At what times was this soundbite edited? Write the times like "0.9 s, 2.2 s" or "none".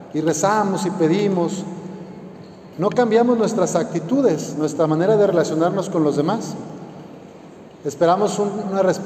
2.7 s